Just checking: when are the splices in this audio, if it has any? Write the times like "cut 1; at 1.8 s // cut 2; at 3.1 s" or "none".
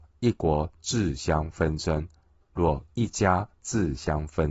cut 1; at 2.4 s